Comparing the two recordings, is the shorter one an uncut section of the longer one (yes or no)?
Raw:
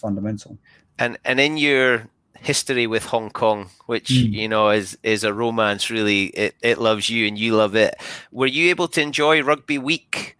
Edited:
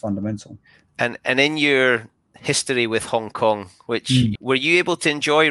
no